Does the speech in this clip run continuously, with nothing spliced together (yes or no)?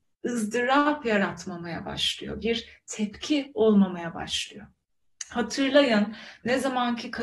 yes